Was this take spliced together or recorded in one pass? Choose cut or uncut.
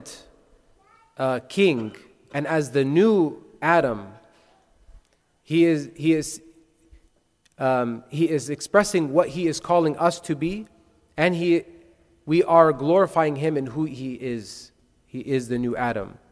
uncut